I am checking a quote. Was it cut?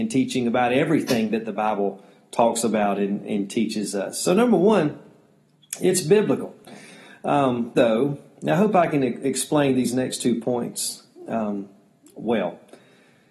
yes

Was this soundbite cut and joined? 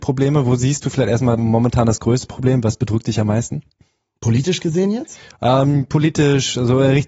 yes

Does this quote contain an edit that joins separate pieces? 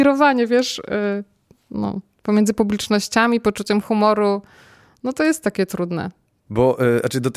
yes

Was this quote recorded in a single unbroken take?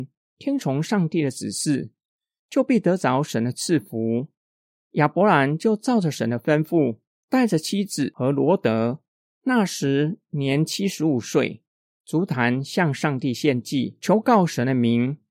no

